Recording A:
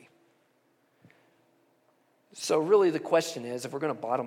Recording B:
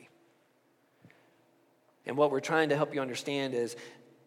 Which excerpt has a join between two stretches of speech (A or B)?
B